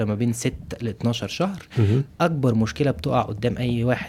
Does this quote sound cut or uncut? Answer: cut